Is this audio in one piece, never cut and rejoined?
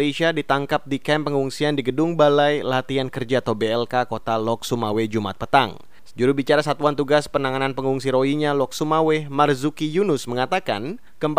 no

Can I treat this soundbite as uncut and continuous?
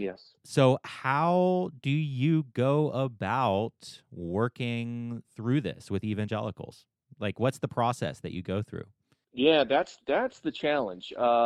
yes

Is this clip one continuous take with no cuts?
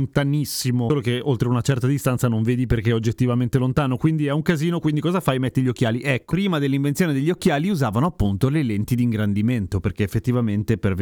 no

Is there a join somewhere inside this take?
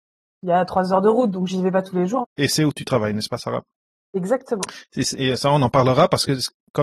yes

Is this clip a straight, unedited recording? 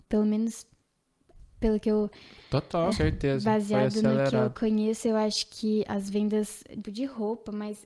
no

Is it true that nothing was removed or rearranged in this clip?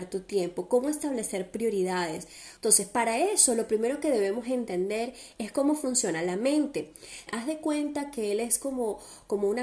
no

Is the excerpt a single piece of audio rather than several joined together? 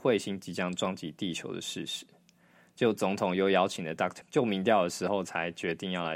no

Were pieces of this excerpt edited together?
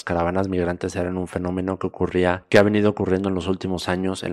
no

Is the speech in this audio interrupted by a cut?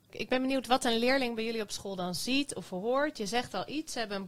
no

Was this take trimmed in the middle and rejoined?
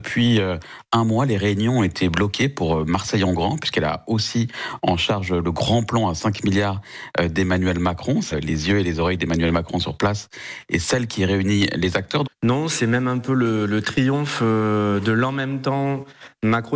yes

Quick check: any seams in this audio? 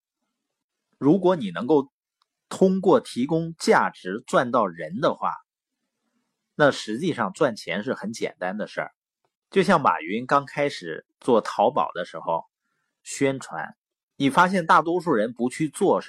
yes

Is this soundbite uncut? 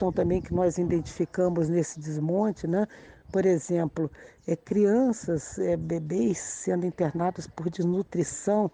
yes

